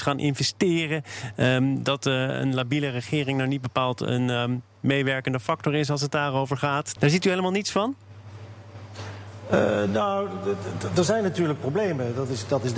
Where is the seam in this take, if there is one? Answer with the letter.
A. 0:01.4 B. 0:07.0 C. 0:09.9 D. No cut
B